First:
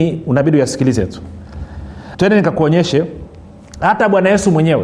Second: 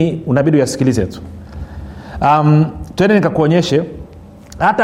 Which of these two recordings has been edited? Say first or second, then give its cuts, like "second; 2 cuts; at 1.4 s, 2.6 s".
first; 1 cut; at 2.1 s